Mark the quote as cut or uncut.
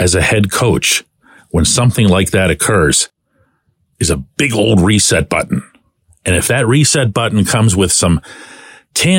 uncut